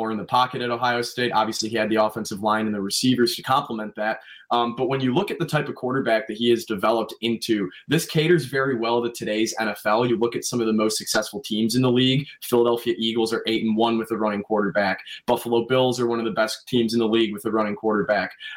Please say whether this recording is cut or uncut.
uncut